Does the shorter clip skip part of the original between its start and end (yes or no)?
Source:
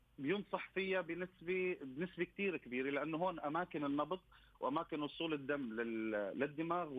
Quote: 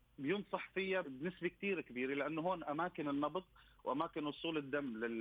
yes